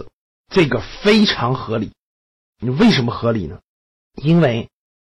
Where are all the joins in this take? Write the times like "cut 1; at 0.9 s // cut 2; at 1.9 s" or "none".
none